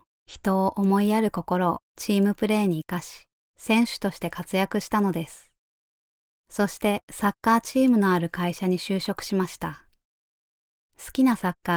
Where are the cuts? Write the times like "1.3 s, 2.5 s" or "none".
none